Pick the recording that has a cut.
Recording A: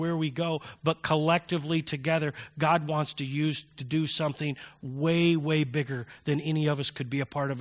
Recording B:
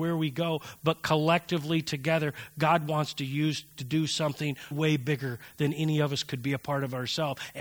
B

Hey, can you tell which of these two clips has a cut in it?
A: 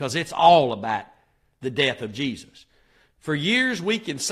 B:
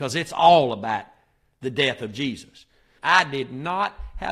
B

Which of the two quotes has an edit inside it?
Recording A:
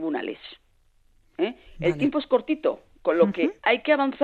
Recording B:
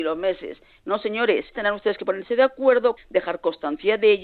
B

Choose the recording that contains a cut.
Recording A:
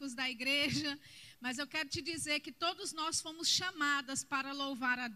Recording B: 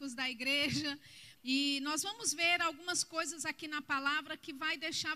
B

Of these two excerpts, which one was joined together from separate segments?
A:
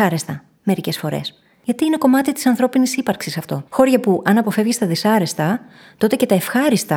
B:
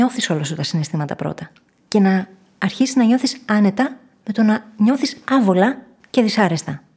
A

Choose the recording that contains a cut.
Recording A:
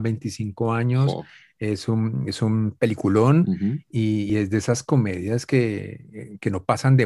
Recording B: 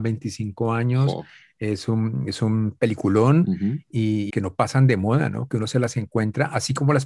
B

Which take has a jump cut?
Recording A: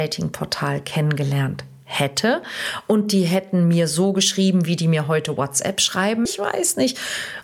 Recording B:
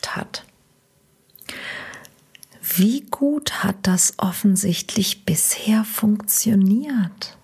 A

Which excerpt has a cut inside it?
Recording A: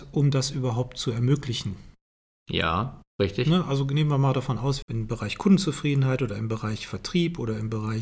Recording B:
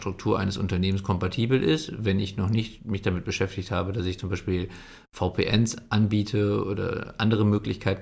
A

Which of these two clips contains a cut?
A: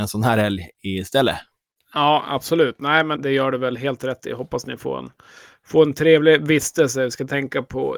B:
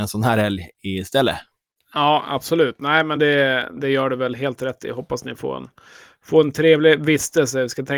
A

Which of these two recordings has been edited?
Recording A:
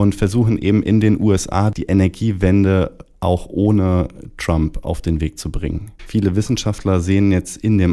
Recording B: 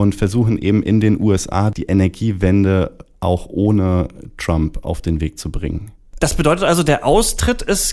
A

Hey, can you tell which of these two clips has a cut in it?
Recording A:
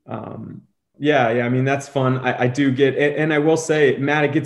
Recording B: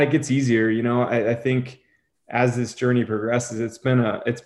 A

